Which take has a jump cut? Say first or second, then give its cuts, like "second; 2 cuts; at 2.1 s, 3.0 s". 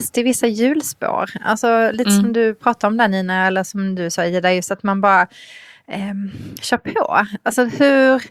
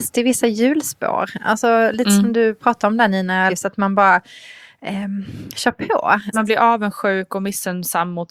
second; 2 cuts; at 3.5 s, 6.3 s